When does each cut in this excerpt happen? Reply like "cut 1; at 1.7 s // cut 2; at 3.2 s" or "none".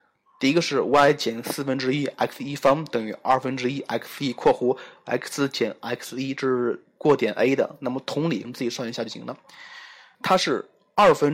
cut 1; at 8.4 s // cut 2; at 10.2 s